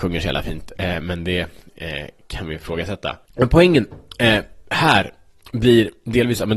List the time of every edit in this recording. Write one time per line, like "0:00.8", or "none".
0:03.2